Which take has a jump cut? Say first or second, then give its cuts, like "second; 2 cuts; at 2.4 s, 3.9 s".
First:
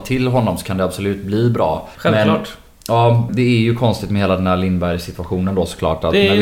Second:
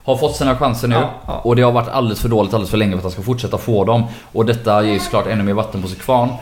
first; 2 cuts; at 1.9 s, 3.3 s